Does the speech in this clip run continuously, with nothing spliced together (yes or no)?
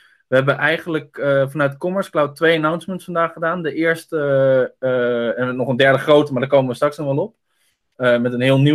yes